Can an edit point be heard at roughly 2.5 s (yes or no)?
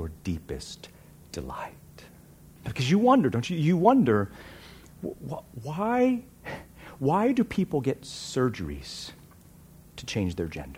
yes